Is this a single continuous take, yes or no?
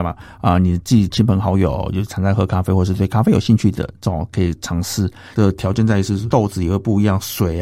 no